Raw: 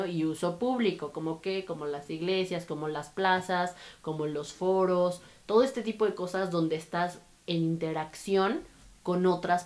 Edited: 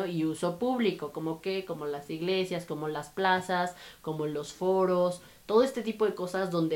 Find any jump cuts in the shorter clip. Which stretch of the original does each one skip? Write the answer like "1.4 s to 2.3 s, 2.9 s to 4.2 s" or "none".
none